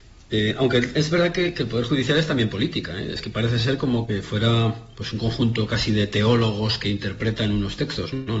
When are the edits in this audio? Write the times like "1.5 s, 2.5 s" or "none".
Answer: none